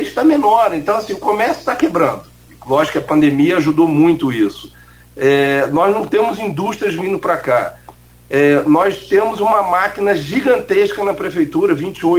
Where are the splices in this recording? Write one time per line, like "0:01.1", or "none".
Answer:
none